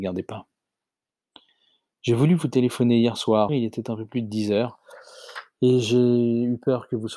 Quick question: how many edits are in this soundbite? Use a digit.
1